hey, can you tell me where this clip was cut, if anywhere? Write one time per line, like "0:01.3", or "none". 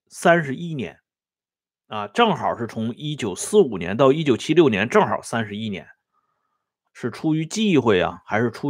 0:06.9